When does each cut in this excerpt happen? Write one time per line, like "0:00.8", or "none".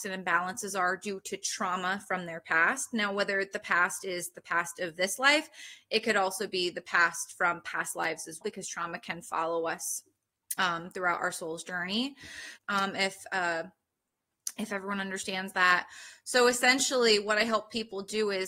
0:08.4
0:12.6